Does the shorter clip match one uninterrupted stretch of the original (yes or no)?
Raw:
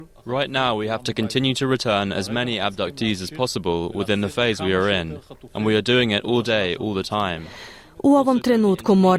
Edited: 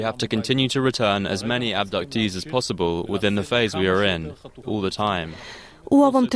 no